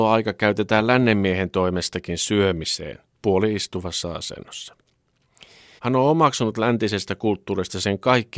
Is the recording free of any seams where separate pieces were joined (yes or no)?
no